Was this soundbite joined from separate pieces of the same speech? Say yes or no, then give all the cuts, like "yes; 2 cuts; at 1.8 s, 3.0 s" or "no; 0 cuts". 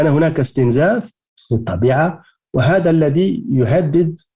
no; 0 cuts